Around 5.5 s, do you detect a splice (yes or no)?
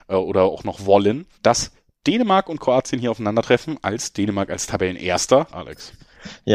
yes